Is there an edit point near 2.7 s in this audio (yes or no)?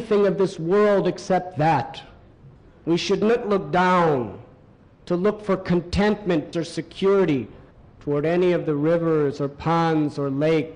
no